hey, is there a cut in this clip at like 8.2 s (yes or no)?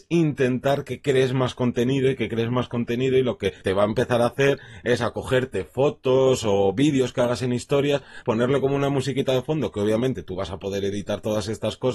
yes